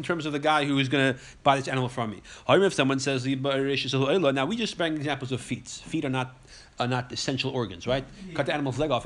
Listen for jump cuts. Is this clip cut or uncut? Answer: uncut